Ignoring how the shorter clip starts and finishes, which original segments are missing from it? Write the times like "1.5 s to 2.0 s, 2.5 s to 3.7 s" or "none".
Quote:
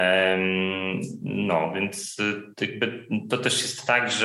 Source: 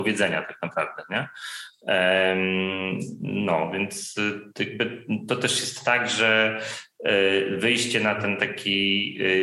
none

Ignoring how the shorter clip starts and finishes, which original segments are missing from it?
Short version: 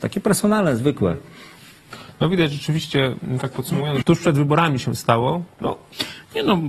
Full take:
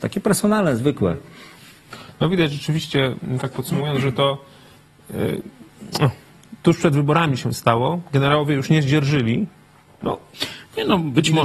4.0 s to 6.6 s, 8.1 s to 9.9 s

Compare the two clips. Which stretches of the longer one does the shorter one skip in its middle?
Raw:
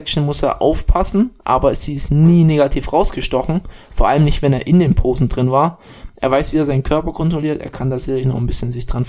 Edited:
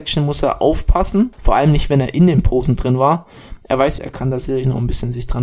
1.3 s to 3.9 s, 6.5 s to 7.6 s

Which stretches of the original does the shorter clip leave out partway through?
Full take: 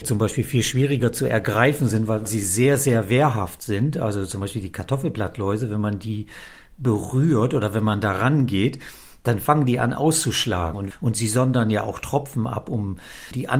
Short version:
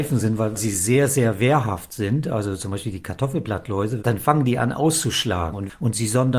5.7 s to 9.2 s

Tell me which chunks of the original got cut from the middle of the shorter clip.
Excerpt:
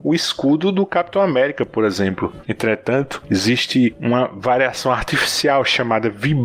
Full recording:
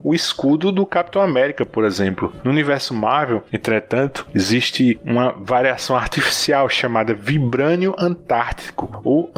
2.4 s to 3.5 s

